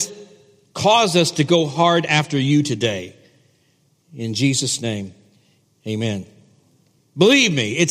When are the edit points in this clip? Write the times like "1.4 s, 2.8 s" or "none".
7.0 s